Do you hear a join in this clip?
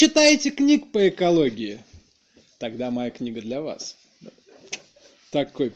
no; 0 cuts

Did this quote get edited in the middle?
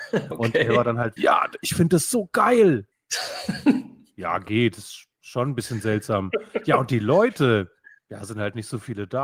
yes; 1 cut; at 1.2 s

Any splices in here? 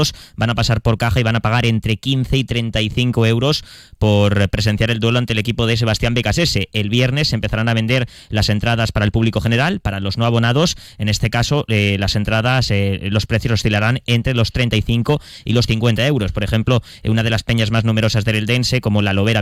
no; 0 cuts

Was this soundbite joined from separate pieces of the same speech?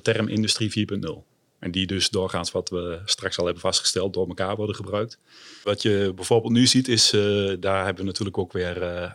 no; 0 cuts

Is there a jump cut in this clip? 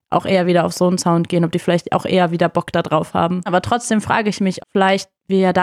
yes; 2 cuts; at 3.5 s, 4.6 s

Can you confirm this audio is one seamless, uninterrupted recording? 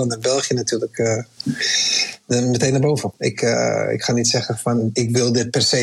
no; 1 cut; at 3.1 s

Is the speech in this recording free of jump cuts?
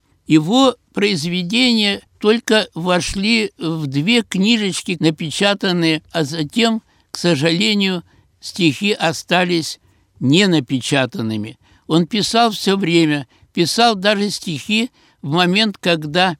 no; 1 cut; at 5.0 s

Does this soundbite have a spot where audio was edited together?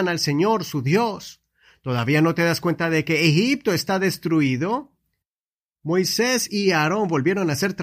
no; 0 cuts

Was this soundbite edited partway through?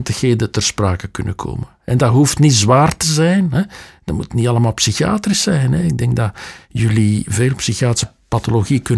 no; 0 cuts

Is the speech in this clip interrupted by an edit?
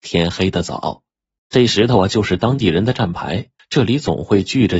yes; 2 cuts; at 1.4 s, 3.6 s

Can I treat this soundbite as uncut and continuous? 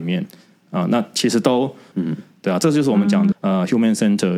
no; 2 cuts; at 1.9 s, 3.3 s

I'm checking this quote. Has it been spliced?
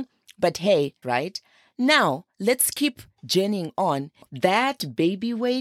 yes; 2 cuts; at 1.0 s, 4.3 s

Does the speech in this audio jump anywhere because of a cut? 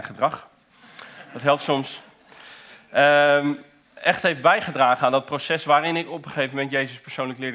no; 0 cuts

